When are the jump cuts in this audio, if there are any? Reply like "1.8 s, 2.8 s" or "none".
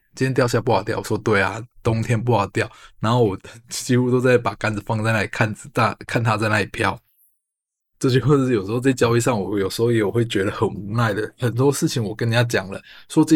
7.8 s